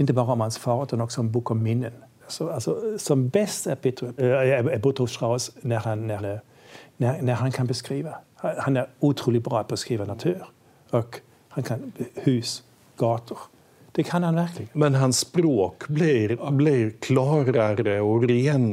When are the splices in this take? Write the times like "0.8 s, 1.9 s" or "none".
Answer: 2.2 s, 4.2 s, 6.2 s